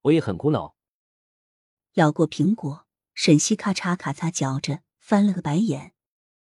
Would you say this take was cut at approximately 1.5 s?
no; 0 cuts

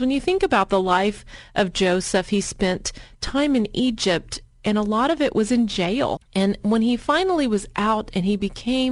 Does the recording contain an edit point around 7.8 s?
no; 1 cut; at 6.2 s

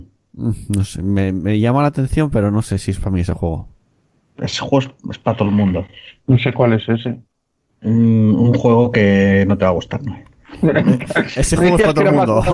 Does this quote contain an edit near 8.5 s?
no; 0 cuts

